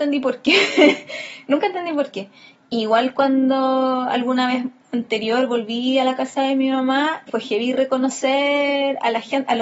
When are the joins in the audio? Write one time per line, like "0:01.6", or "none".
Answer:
0:07.3